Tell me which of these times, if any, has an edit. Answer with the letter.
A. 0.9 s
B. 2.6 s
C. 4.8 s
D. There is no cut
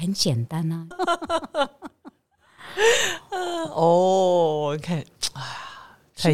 A